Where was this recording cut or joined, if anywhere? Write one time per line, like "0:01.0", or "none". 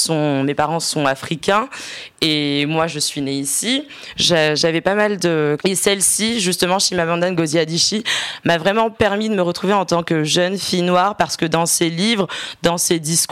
0:05.6